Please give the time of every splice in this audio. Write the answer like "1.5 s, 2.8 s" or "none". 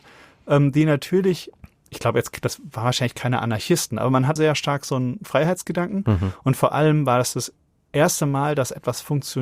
4.4 s